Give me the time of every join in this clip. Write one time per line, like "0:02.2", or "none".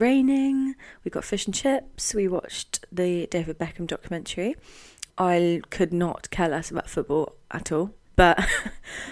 0:05.1
0:08.1